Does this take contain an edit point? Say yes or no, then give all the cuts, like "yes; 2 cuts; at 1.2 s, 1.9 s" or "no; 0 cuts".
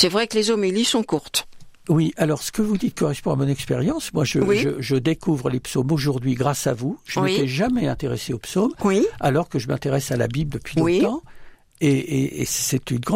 no; 0 cuts